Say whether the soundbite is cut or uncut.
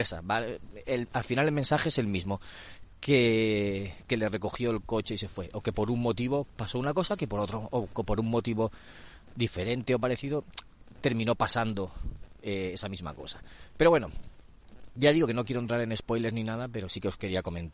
uncut